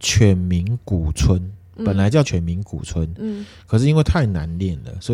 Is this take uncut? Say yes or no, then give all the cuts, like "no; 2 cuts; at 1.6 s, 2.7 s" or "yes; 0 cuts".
no; 1 cut; at 2.2 s